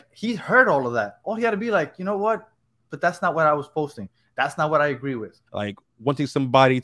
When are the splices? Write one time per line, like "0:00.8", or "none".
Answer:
0:05.5